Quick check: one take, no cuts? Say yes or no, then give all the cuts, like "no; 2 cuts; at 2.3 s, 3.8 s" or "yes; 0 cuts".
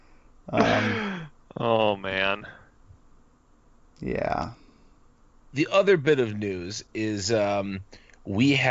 yes; 0 cuts